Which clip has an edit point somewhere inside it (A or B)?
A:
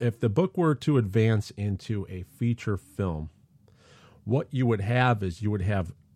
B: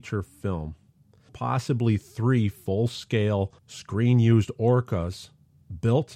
B